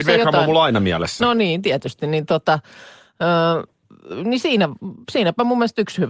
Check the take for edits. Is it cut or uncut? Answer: uncut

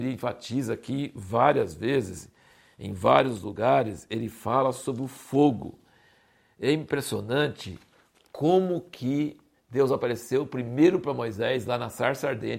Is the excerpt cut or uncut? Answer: uncut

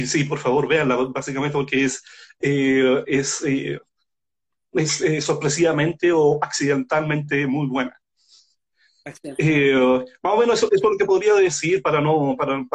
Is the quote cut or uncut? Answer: uncut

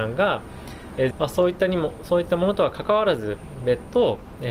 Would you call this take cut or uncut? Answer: cut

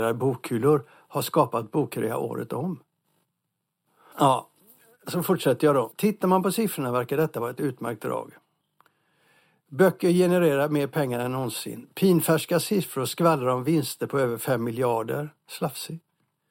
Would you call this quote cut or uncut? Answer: cut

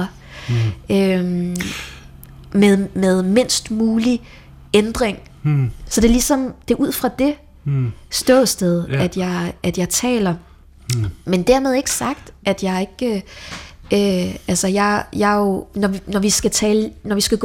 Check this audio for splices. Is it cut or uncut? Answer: cut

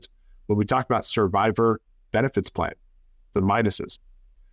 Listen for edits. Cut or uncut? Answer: cut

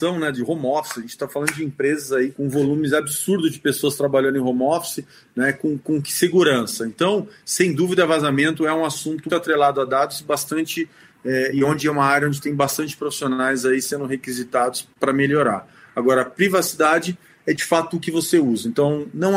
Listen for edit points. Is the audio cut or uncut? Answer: cut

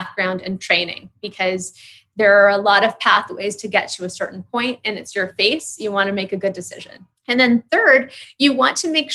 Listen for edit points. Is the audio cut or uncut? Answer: uncut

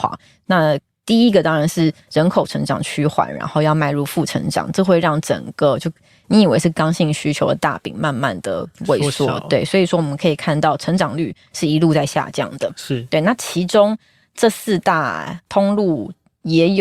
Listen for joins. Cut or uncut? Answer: uncut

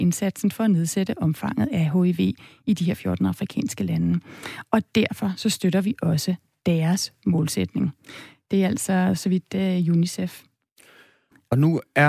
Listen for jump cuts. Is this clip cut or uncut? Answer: uncut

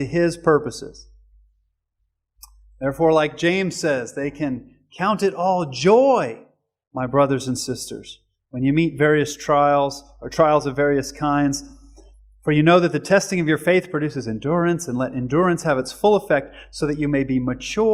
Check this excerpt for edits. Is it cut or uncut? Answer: uncut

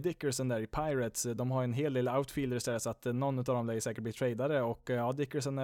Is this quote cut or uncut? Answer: uncut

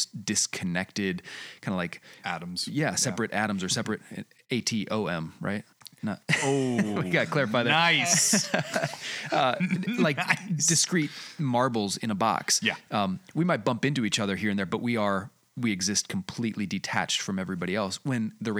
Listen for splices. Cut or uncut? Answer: uncut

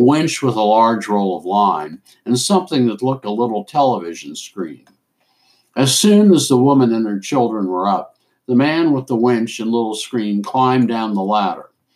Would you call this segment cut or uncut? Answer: cut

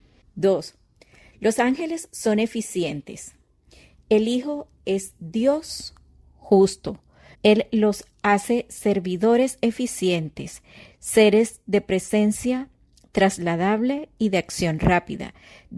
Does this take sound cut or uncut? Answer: cut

